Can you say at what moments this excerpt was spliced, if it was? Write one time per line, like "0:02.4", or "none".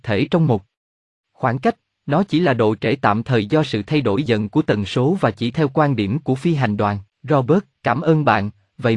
0:04.3
0:07.1